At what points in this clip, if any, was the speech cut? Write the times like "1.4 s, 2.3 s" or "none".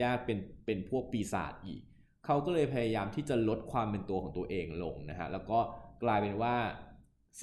none